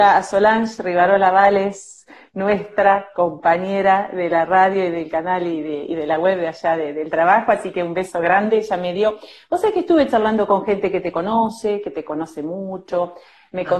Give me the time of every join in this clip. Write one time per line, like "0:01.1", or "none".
none